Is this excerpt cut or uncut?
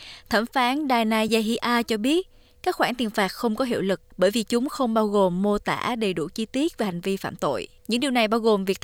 cut